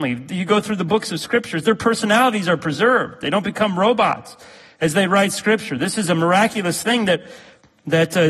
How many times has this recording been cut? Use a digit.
0